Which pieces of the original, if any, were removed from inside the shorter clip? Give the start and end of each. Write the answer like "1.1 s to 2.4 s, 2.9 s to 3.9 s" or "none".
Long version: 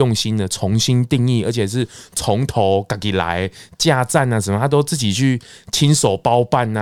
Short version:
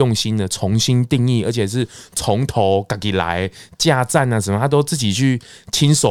none